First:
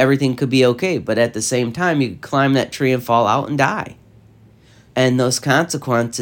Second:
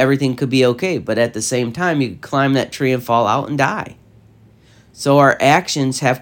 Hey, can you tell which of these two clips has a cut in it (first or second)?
first